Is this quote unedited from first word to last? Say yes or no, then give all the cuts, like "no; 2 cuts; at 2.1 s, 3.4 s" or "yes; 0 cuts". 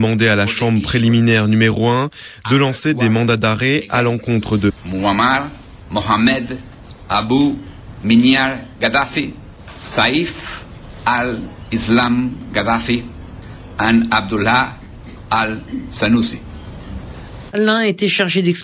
no; 1 cut; at 17.5 s